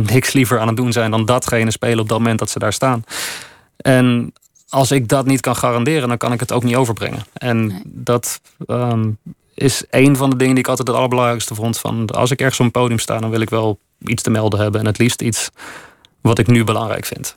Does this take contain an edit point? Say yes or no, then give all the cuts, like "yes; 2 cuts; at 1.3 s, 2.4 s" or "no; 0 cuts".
no; 0 cuts